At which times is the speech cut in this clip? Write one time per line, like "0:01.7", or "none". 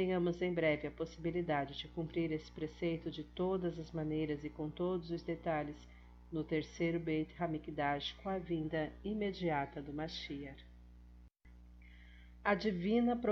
none